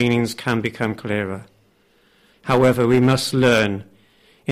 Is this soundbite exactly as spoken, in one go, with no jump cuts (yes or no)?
no